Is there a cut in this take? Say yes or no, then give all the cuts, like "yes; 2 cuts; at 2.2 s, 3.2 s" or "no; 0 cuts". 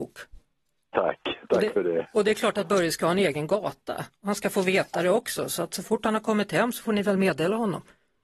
no; 0 cuts